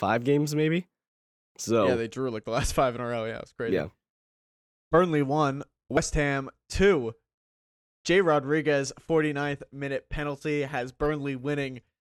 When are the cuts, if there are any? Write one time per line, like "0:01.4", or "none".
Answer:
none